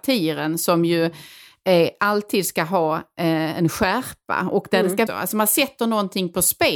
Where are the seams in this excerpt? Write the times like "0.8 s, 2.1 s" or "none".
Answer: 5.1 s